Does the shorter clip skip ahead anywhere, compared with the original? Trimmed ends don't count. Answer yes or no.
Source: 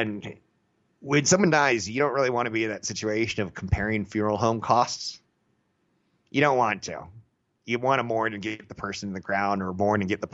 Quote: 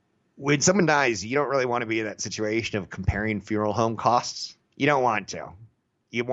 yes